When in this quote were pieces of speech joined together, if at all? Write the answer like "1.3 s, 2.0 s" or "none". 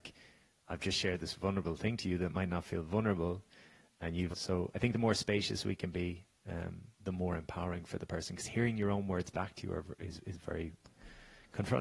4.3 s, 6.9 s

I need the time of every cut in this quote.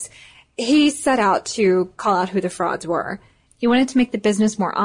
3.5 s

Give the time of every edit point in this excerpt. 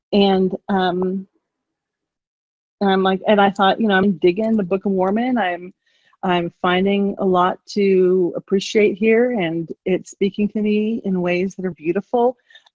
4.0 s, 11.7 s

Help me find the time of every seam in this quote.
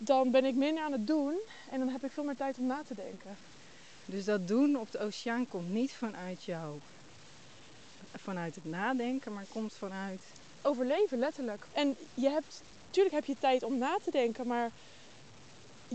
11.7 s

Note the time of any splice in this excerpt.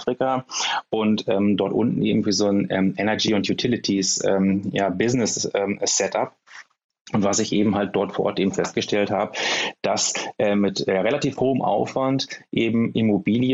none

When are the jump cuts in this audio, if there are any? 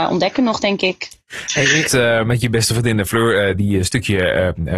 1.9 s

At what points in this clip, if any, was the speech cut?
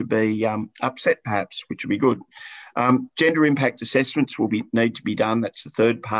none

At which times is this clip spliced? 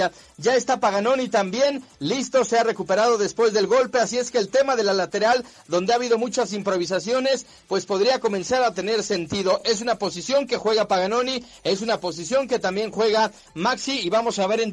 none

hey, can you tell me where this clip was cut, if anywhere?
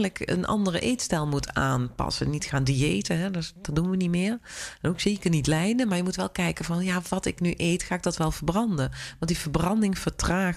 none

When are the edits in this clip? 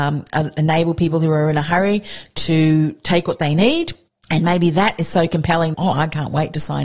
5.7 s

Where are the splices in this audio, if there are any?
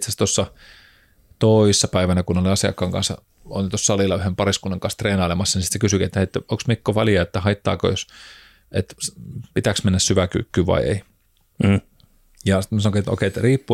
none

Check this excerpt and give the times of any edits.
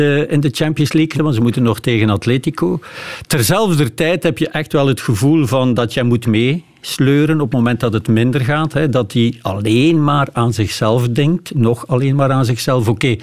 1.2 s

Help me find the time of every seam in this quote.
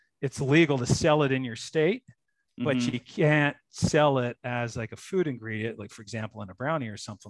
none

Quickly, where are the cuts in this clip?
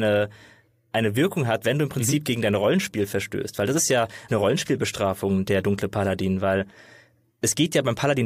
4.3 s

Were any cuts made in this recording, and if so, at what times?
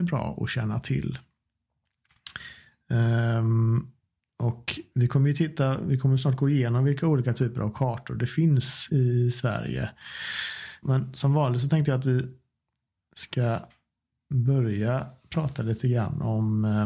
8.9 s, 10.8 s

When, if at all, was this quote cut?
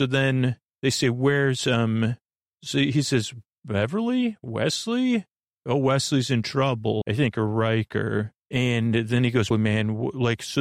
7.0 s, 8.4 s, 9.5 s

